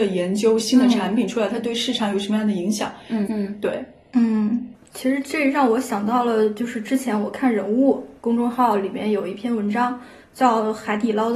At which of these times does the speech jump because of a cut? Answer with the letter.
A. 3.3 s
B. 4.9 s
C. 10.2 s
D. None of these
A